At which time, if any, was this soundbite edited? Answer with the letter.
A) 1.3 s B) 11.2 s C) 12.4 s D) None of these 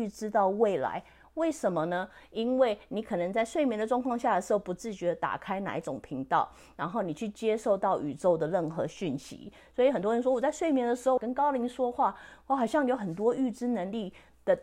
B